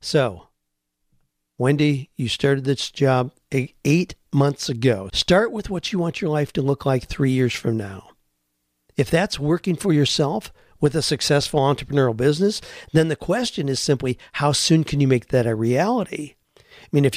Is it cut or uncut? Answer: cut